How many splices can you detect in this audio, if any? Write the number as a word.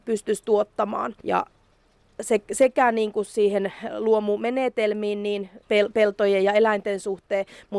two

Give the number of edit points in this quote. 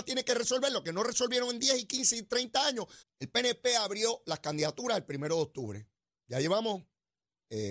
one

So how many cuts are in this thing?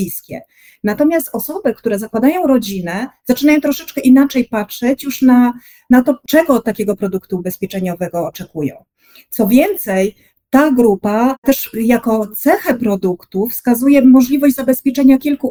zero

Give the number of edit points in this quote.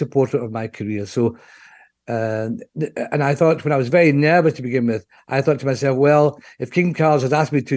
zero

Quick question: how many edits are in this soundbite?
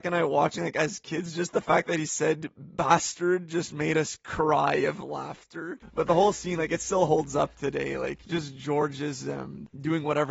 zero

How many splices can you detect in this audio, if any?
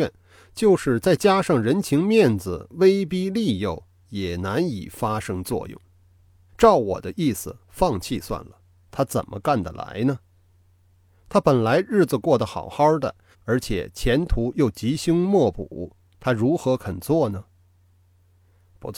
three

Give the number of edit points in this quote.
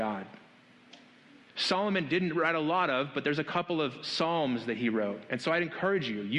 one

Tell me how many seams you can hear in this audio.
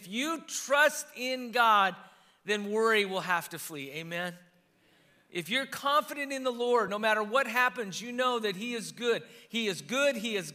zero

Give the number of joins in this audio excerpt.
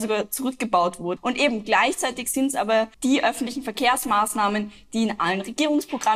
two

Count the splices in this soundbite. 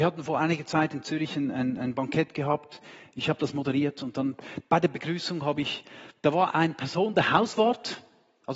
one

